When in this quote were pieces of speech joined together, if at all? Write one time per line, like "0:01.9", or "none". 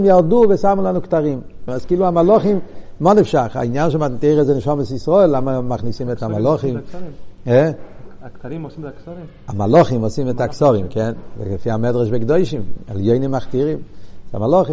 0:01.7